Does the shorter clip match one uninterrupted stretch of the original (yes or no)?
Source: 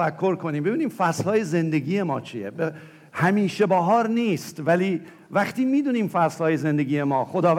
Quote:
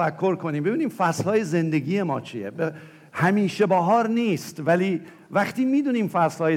yes